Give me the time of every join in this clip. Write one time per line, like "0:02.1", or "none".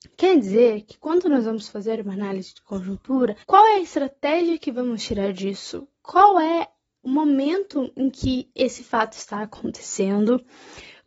0:03.4